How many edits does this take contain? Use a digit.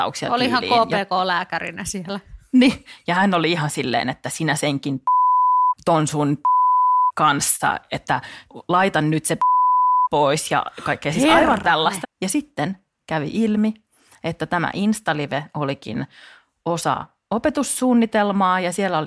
1